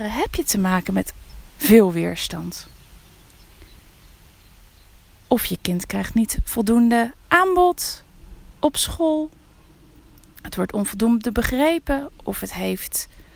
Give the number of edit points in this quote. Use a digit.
1